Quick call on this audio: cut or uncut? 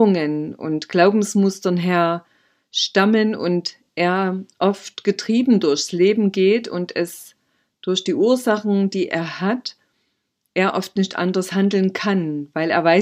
uncut